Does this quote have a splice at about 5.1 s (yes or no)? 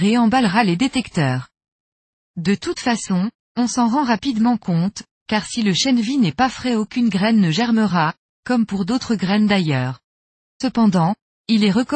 no